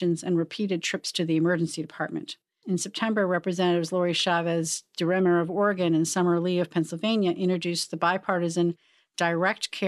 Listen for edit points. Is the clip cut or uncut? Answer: cut